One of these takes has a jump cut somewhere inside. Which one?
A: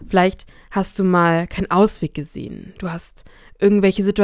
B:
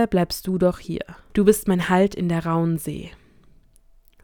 B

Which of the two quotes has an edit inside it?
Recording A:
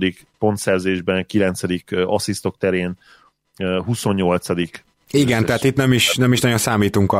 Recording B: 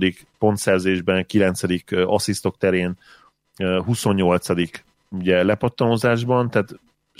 A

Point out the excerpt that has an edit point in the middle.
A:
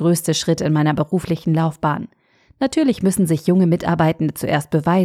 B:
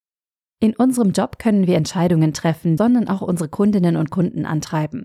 B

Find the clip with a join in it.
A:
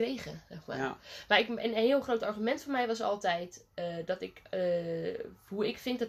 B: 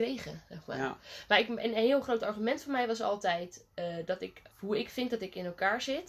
B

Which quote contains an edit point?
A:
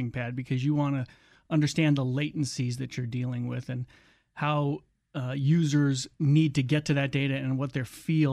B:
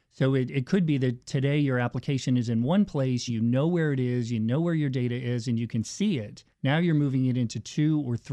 B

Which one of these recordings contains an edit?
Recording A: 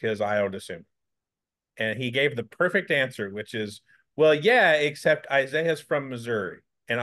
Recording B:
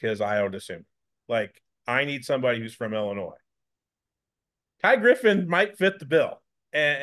B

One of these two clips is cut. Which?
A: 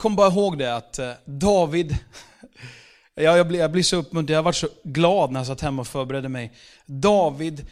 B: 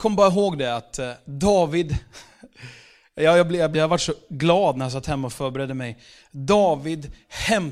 B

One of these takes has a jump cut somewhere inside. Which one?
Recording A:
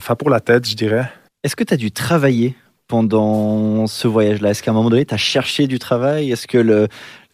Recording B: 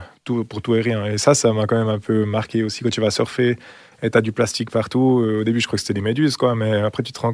A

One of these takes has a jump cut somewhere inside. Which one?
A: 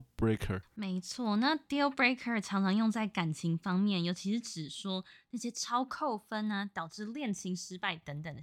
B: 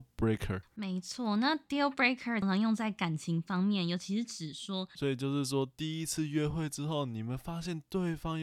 B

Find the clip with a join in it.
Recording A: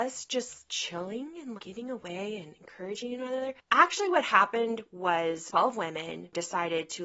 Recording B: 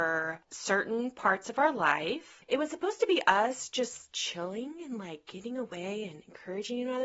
A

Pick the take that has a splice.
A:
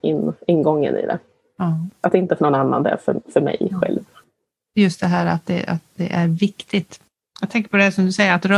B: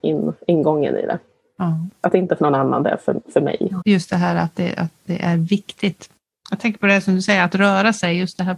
B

